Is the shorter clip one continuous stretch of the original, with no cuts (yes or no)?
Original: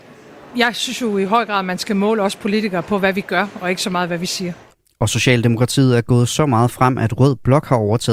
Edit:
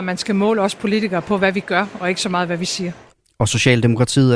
yes